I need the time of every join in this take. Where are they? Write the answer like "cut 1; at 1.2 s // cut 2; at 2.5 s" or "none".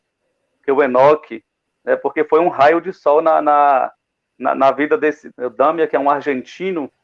cut 1; at 1.7 s // cut 2; at 5.3 s